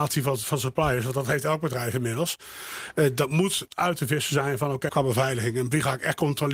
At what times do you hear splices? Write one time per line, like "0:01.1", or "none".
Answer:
0:04.9